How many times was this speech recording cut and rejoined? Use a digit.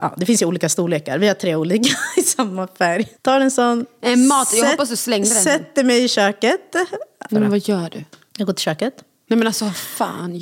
2